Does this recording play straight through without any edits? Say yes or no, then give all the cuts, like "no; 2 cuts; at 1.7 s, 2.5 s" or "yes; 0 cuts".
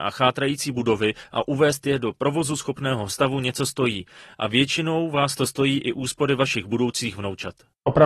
yes; 0 cuts